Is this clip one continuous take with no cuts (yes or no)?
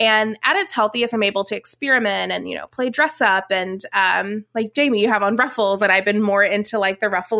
yes